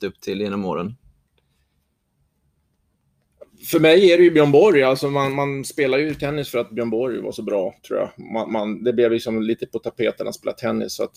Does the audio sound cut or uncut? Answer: uncut